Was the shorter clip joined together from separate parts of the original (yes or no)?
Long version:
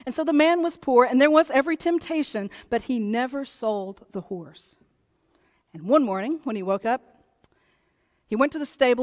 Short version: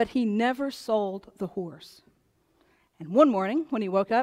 no